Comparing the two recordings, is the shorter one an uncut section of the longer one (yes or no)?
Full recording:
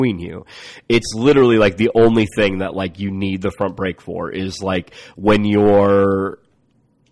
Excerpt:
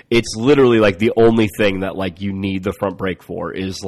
yes